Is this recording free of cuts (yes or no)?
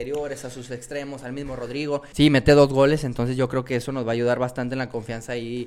no